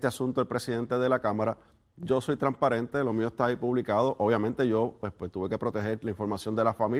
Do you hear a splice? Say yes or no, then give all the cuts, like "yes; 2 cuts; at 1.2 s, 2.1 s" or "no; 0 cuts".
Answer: no; 0 cuts